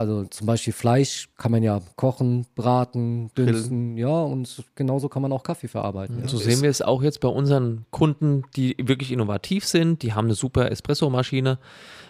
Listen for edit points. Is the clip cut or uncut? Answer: uncut